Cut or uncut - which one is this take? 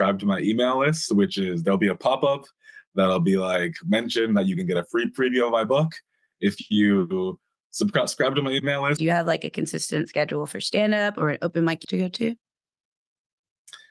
cut